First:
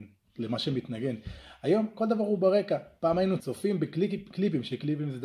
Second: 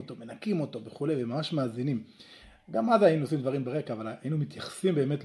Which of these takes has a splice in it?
first; 1 cut; at 3.4 s

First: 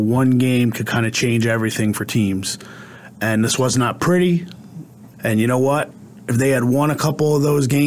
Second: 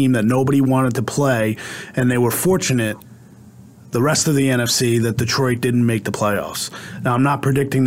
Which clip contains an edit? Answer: first; 1 cut; at 5.1 s

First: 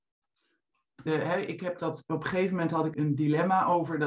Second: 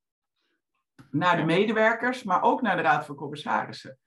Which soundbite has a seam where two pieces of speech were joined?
first; 2 cuts; at 1.1 s, 2.9 s

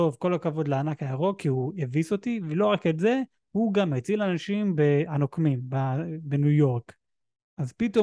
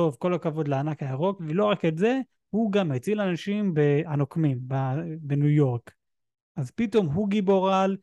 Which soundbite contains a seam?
second; 1 cut; at 1.4 s

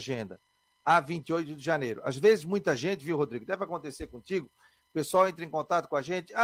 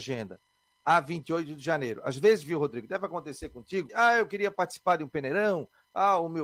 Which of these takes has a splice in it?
second; 2 cuts; at 2.4 s, 3.9 s

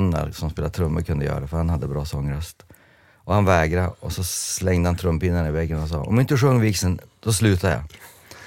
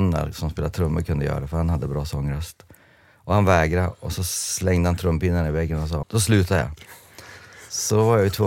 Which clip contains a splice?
second; 1 cut; at 6.0 s

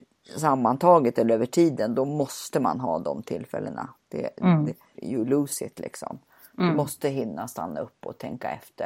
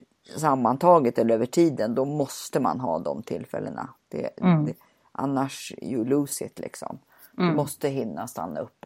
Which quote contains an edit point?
first; 1 cut; at 4.9 s

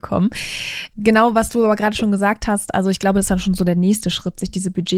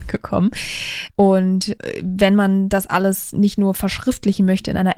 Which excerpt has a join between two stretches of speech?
second; 1 cut; at 1.1 s

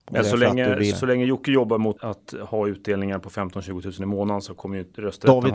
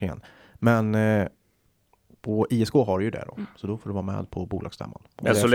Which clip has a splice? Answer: first; 2 cuts; at 0.9 s, 2.0 s

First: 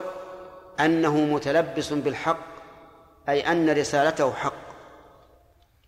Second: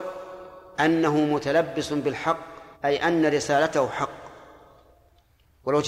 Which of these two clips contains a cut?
second; 1 cut; at 2.7 s

